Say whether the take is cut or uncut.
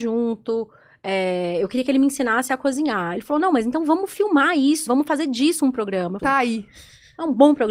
cut